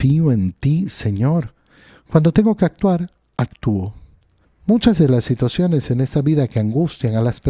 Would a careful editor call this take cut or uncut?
cut